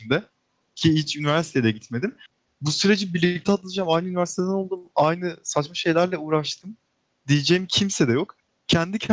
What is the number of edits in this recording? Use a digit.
0